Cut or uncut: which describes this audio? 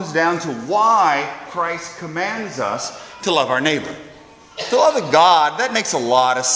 uncut